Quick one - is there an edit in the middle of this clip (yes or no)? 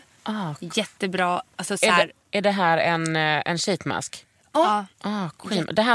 no